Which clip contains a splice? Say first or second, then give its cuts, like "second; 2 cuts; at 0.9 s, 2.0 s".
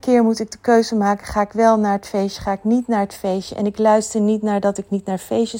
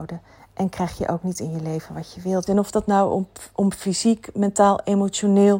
second; 1 cut; at 2.5 s